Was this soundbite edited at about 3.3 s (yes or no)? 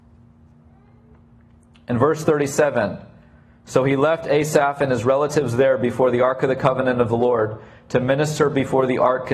no